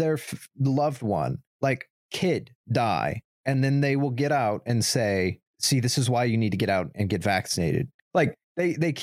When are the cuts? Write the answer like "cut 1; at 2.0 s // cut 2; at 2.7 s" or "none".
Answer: cut 1; at 8.0 s